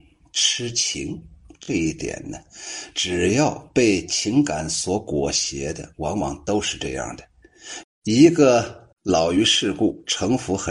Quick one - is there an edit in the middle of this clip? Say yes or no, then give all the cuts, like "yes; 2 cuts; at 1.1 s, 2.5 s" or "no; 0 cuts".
yes; 2 cuts; at 7.8 s, 8.9 s